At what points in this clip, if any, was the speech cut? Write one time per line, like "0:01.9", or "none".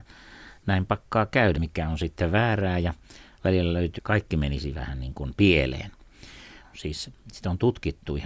0:01.6
0:04.0
0:06.6